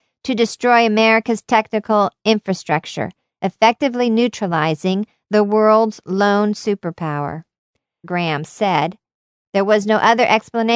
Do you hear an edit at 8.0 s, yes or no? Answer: yes